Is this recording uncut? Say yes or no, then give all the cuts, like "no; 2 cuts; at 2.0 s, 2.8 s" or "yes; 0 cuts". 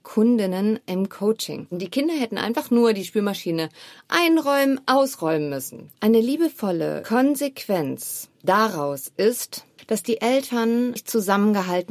no; 3 cuts; at 1.7 s, 4.8 s, 5.9 s